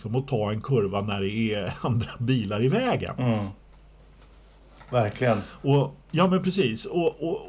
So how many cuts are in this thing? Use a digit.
1